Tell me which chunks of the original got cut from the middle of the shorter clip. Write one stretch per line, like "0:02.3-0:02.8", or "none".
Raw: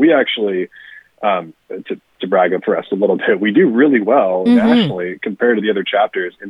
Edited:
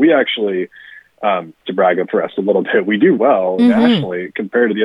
0:01.6-0:02.1
0:03.7-0:04.0